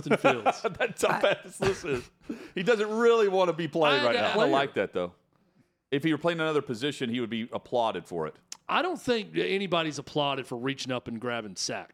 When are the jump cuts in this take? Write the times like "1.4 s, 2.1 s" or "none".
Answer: 4.3 s